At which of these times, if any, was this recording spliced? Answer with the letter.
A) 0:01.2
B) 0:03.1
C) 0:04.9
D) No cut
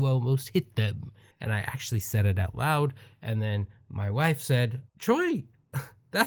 C